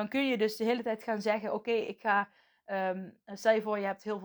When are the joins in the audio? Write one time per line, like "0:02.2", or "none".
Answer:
none